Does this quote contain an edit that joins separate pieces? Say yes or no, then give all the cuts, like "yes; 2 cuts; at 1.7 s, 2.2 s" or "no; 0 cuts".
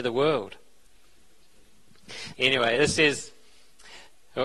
yes; 1 cut; at 2.3 s